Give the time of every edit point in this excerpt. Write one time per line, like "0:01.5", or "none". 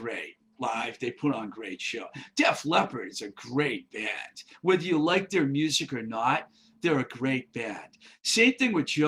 none